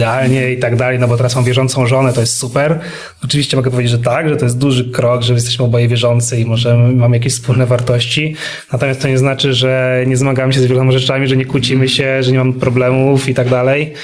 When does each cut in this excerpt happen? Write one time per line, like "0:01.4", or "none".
none